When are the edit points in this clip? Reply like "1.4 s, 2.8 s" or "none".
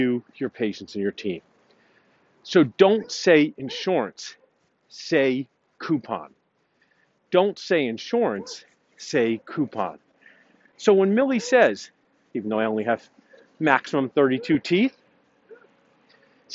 12.3 s